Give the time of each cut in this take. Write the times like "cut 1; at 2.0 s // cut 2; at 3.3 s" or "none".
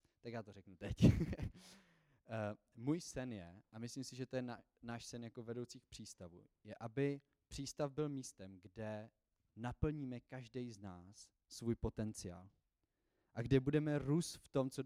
cut 1; at 9.4 s